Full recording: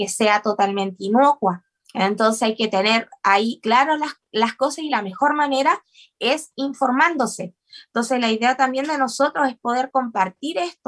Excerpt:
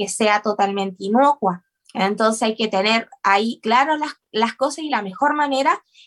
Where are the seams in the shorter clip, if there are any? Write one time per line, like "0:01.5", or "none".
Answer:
none